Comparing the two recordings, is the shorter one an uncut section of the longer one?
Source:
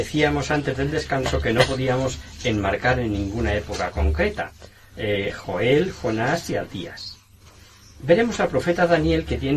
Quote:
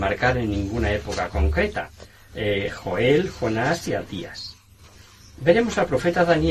yes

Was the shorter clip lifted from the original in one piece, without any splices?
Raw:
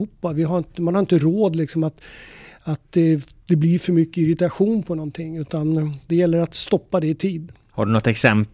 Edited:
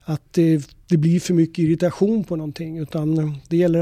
yes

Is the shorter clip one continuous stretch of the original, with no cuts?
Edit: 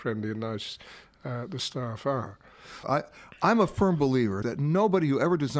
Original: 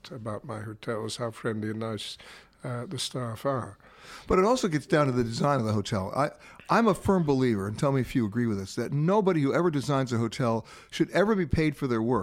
no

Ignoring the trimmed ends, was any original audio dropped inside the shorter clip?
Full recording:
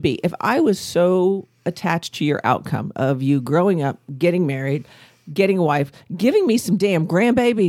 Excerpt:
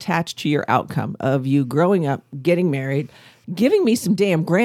yes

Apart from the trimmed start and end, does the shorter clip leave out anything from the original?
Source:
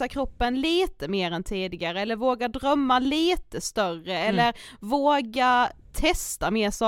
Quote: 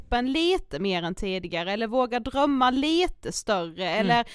no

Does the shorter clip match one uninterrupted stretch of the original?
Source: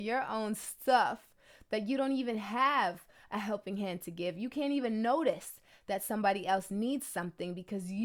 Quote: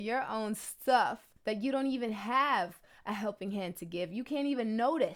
no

